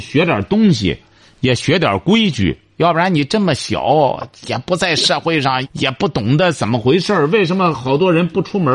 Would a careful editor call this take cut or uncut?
cut